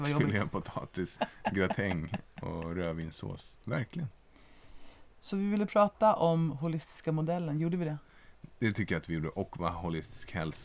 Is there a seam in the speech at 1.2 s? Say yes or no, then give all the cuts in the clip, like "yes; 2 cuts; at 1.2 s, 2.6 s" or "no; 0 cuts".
yes; 2 cuts; at 1.2 s, 3.6 s